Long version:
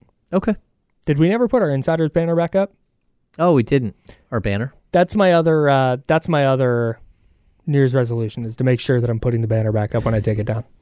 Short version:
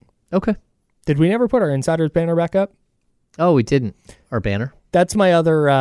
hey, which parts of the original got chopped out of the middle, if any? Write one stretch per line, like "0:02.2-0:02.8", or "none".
none